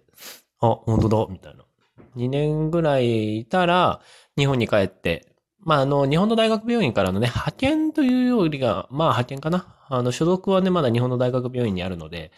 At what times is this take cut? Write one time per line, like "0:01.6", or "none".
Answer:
0:02.1